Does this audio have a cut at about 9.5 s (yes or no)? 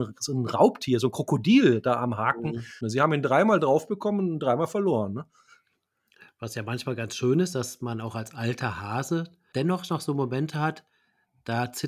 yes